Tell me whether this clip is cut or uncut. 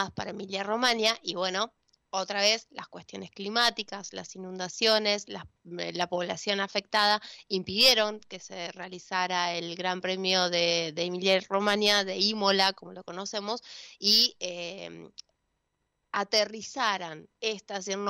uncut